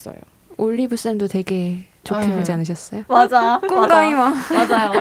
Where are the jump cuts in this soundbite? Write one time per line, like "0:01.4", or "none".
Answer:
0:03.1